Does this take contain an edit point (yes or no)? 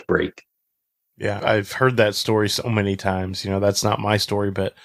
yes